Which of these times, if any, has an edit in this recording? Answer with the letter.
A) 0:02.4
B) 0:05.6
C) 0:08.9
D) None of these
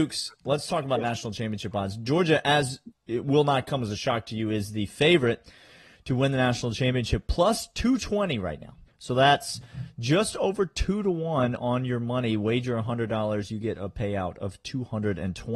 C